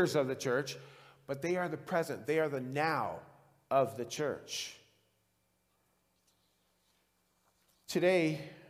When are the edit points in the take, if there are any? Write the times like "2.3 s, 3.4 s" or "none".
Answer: none